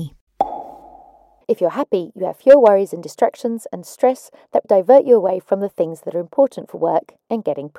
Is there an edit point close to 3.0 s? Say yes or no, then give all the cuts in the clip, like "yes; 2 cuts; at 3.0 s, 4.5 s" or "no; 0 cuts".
no; 2 cuts; at 1.4 s, 4.6 s